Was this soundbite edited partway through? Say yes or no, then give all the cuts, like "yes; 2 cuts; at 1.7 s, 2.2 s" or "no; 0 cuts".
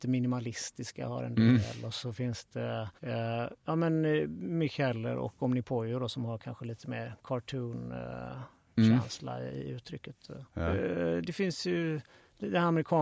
yes; 2 cuts; at 3.0 s, 10.5 s